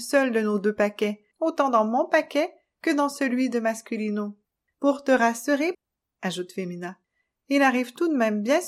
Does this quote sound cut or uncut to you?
cut